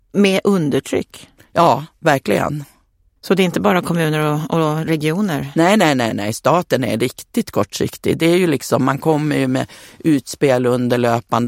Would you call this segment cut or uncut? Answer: cut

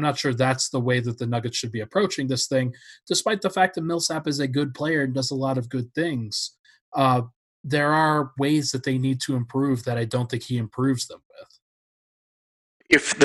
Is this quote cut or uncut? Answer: uncut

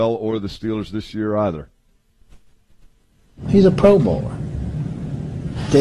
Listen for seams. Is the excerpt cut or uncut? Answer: uncut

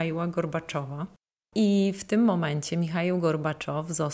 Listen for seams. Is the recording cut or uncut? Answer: uncut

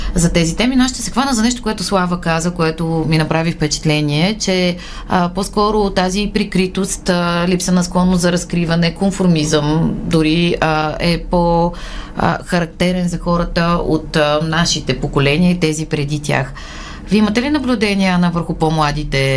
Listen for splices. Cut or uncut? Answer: uncut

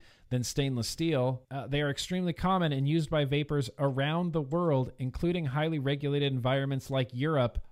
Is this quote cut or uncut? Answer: cut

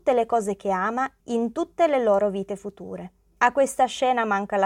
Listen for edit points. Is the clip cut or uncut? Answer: cut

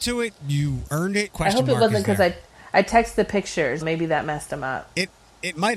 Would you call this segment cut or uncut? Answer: cut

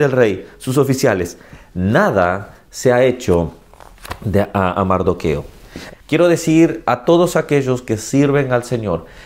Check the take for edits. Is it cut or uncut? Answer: cut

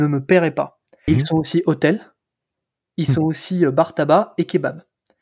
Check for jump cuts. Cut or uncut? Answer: cut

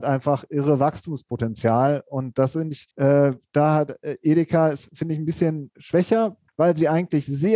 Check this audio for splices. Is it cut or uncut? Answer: cut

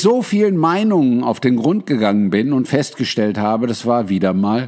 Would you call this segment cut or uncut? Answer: uncut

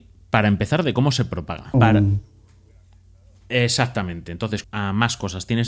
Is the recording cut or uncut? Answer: cut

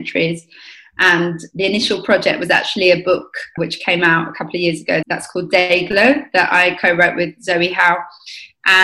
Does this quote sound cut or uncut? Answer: cut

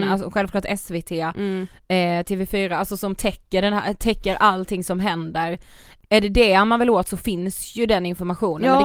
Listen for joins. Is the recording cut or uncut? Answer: uncut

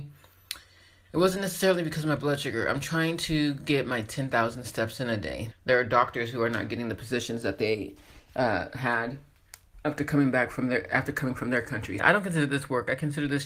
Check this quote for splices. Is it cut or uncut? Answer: cut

